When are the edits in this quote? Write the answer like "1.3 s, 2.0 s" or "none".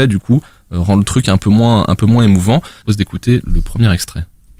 none